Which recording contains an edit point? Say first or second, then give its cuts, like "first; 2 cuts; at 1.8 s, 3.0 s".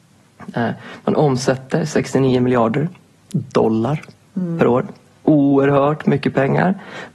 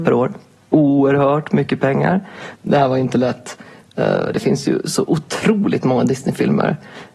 second; 1 cut; at 2.6 s